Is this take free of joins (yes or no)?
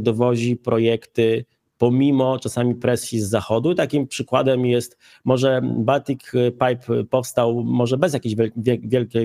yes